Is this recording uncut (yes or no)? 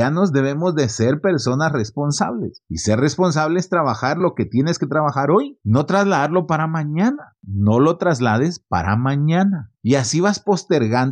no